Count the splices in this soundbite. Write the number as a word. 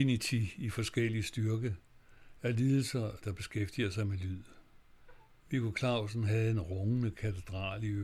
one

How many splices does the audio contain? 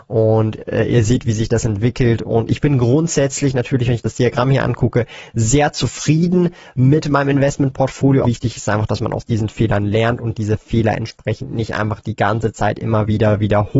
one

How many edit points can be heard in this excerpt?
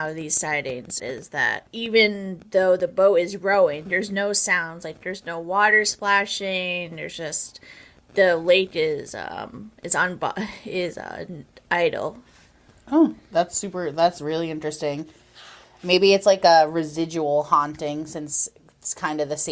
one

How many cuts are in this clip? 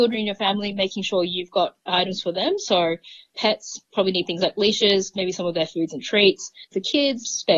one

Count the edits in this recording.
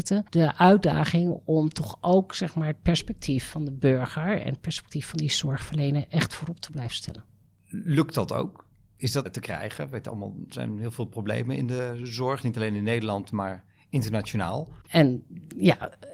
two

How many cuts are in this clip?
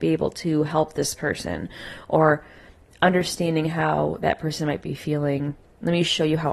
zero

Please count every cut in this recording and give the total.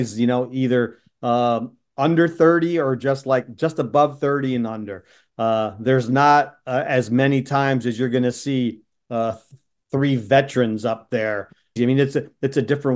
one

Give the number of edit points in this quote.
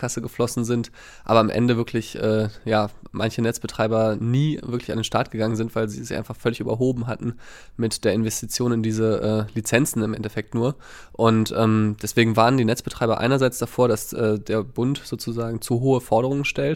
zero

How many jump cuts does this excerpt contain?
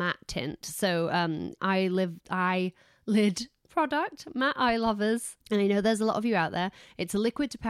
two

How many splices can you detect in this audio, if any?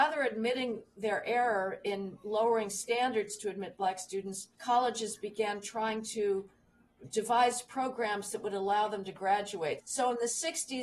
two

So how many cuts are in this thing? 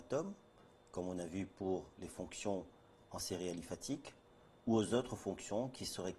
zero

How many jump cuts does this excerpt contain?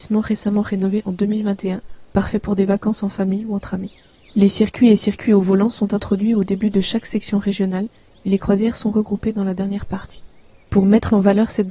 one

